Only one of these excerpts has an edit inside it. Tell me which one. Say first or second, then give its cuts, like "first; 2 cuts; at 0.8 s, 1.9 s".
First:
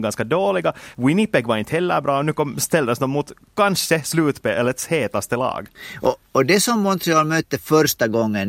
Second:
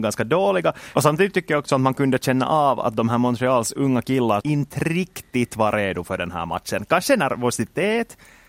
second; 2 cuts; at 0.9 s, 4.4 s